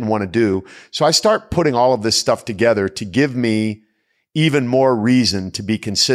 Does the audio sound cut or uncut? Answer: uncut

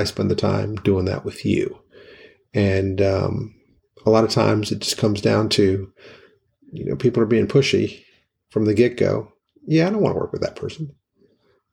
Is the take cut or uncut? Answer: uncut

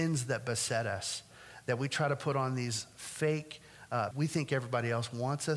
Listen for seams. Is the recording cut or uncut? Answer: cut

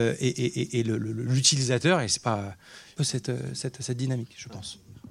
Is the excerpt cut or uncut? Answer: cut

